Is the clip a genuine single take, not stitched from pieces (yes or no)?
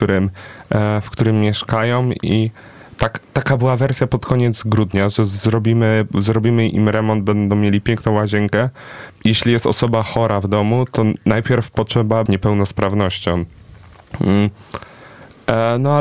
no